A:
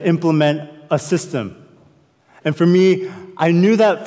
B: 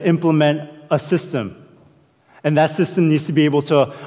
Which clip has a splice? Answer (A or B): A